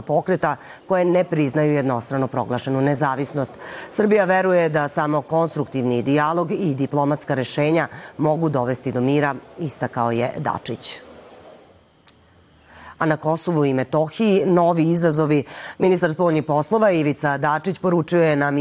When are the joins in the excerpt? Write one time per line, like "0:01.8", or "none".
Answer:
0:15.7